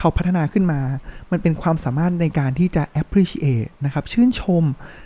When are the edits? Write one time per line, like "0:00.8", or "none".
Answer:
none